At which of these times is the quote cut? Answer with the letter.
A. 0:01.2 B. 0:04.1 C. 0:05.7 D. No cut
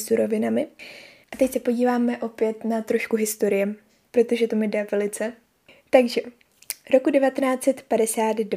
A